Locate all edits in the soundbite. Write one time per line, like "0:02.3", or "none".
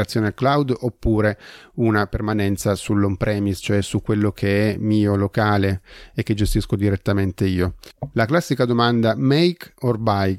0:08.1

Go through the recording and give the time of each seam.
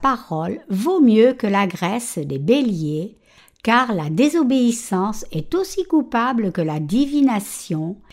none

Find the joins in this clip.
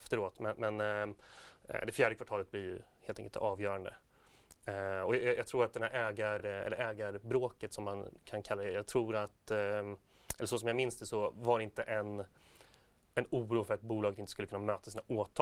none

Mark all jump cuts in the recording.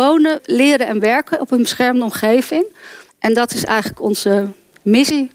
0:03.1

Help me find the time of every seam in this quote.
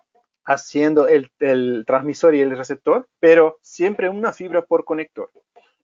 0:03.1

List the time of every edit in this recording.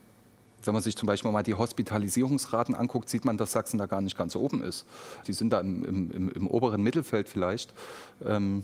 0:05.2

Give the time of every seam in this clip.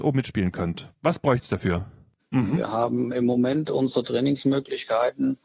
0:02.2

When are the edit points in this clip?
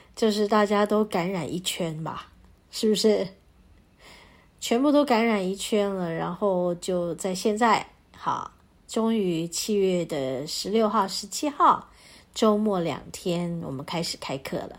none

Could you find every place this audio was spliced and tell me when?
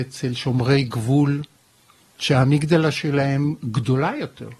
none

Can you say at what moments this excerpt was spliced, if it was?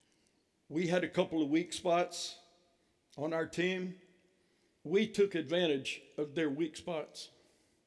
0:04.8

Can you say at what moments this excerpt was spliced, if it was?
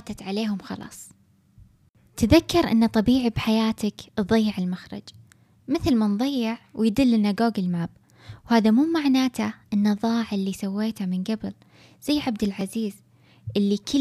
none

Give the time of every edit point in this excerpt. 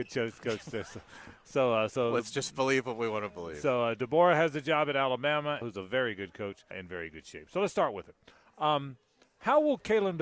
0:05.6
0:06.7

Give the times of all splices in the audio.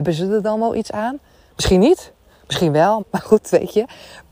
0:01.5
0:03.0

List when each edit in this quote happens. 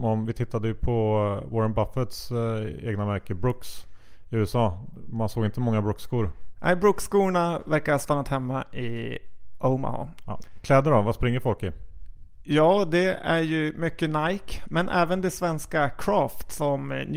none

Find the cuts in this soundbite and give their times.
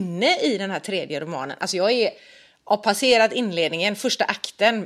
none

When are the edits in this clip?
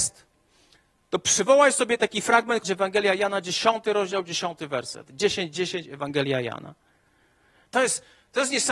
0:02.6
0:07.7

